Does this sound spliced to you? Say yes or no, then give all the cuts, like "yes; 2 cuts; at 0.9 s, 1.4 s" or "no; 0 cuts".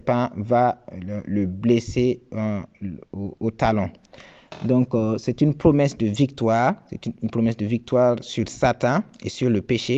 no; 0 cuts